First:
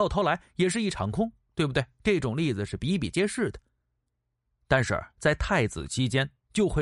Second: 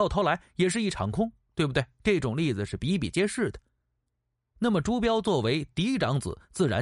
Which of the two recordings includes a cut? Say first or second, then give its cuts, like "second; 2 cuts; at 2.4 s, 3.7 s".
first; 1 cut; at 4.5 s